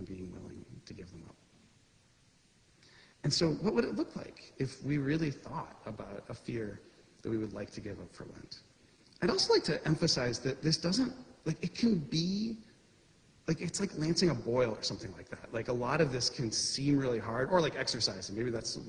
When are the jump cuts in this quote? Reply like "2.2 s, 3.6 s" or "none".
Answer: none